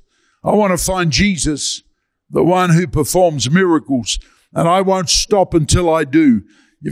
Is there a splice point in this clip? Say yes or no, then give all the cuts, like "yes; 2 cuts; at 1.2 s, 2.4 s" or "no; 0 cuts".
no; 0 cuts